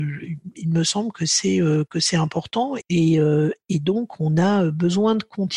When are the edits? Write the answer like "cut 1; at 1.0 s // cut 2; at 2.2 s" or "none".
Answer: cut 1; at 2.8 s